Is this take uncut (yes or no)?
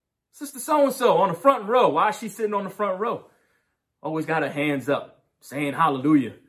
yes